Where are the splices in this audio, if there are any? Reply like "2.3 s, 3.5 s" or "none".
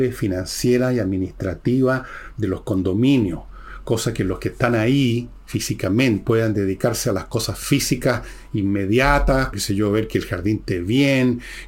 6.2 s, 9.5 s